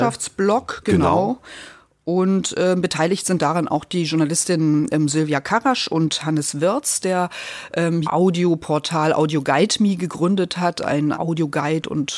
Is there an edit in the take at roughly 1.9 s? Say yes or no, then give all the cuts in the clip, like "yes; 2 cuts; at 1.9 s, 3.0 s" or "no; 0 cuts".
no; 2 cuts; at 8.0 s, 11.1 s